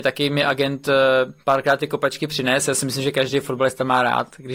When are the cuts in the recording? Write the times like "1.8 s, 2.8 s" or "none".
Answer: 1.4 s